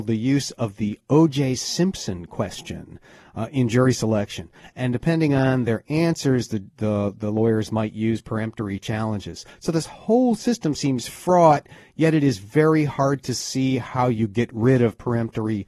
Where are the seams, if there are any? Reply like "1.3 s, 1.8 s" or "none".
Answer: 4.6 s